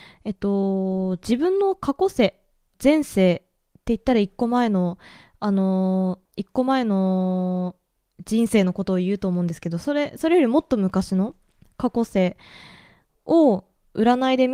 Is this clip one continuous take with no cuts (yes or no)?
no